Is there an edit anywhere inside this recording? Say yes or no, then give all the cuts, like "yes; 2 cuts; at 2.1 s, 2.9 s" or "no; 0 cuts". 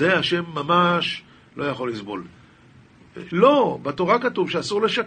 yes; 1 cut; at 3.3 s